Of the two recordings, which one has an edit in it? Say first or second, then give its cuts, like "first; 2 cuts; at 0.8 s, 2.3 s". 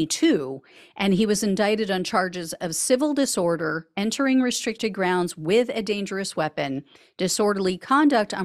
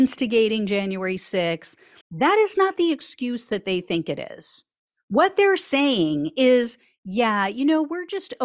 second; 1 cut; at 2.0 s